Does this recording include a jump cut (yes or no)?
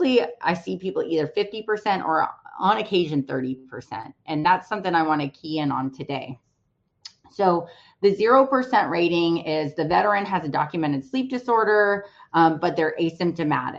no